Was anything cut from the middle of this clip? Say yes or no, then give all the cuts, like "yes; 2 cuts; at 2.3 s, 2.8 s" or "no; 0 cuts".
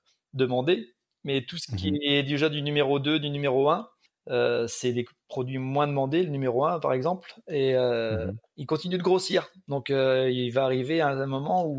no; 0 cuts